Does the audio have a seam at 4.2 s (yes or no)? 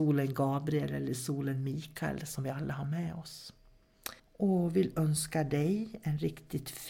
yes